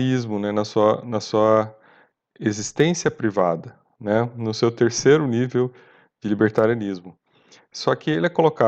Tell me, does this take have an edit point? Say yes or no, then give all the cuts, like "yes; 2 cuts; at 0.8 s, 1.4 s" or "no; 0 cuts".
no; 0 cuts